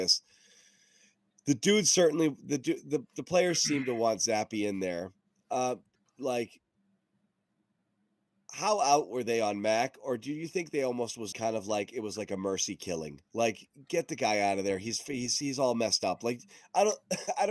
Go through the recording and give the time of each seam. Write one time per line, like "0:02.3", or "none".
0:11.3